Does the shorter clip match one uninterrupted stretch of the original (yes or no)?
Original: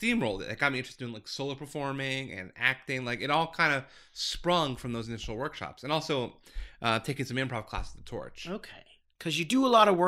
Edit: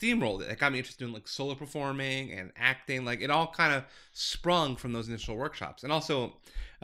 yes